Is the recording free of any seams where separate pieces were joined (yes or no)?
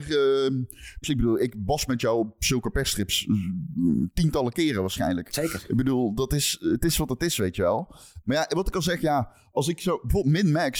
no